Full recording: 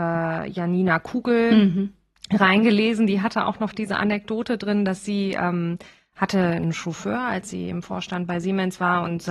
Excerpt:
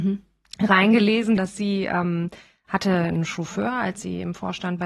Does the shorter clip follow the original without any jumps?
no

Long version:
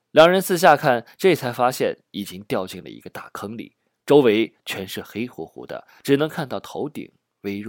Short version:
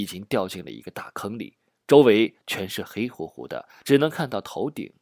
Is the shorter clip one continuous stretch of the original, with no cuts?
yes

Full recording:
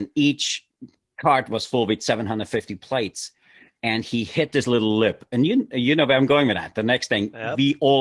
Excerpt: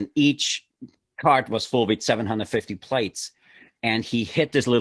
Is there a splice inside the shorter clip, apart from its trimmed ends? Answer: no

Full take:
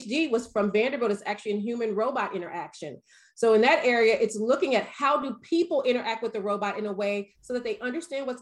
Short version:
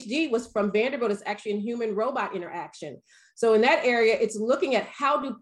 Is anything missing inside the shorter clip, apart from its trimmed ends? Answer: no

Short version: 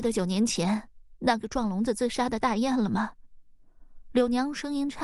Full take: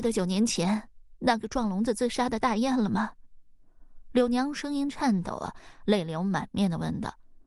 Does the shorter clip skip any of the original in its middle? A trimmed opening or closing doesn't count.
no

